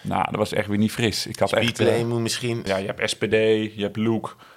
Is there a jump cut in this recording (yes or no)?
yes